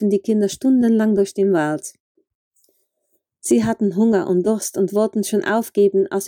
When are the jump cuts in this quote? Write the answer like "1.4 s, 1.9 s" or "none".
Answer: none